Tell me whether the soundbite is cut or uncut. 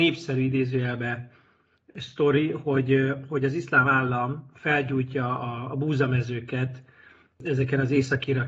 uncut